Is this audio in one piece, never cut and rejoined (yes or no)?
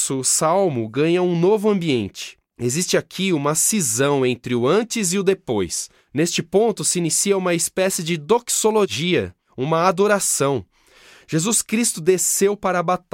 yes